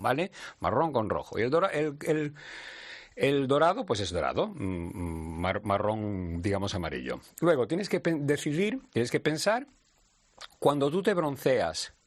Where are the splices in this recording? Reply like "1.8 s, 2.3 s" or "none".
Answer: none